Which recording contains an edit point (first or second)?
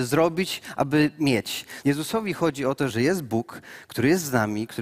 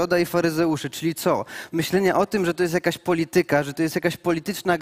first